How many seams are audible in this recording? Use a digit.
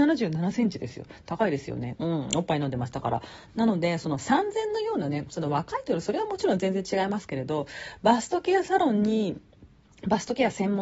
1